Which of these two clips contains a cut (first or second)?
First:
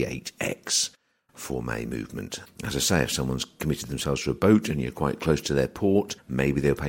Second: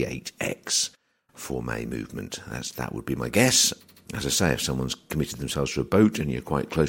first